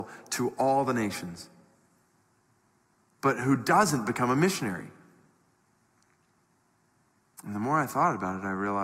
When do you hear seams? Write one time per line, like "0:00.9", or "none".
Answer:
none